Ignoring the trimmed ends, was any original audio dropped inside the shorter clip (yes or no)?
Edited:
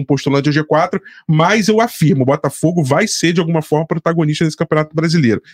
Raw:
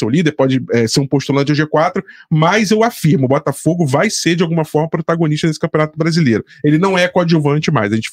no